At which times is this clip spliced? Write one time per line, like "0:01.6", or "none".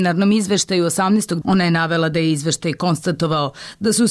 0:01.4